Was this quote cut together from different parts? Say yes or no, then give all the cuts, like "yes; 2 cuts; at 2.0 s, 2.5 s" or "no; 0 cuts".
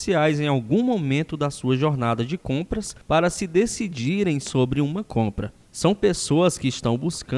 no; 0 cuts